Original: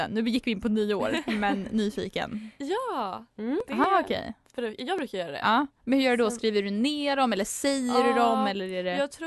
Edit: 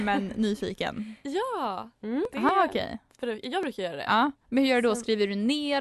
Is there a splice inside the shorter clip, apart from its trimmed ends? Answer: no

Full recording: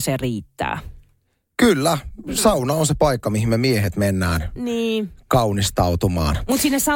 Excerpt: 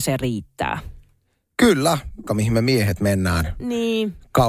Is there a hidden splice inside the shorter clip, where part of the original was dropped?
yes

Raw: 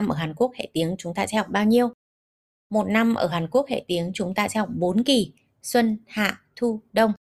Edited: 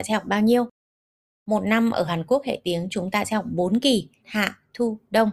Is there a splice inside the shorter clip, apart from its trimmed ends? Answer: yes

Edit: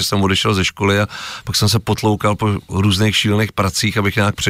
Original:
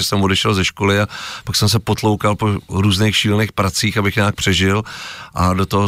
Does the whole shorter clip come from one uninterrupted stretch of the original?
yes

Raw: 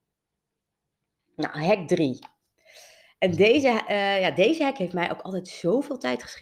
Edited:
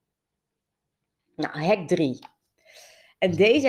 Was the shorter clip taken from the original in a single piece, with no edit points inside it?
yes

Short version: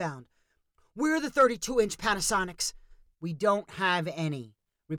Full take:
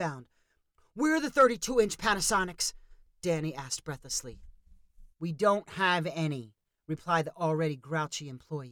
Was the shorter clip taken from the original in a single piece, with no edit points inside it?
no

